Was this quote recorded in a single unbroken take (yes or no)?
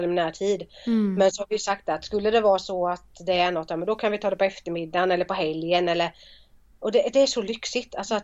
yes